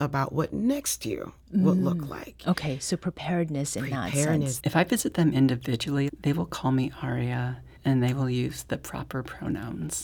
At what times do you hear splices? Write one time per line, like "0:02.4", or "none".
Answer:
0:04.6
0:06.1
0:07.8